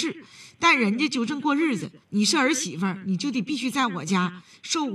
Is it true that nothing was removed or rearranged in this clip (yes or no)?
no